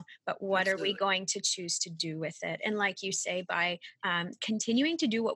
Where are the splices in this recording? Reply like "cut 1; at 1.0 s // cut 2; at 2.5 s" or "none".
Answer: none